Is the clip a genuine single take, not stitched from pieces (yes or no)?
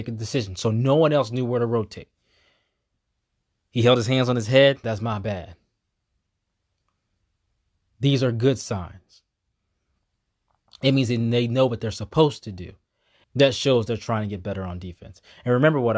no